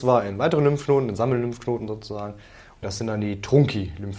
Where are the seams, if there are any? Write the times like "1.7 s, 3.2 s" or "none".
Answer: 2.8 s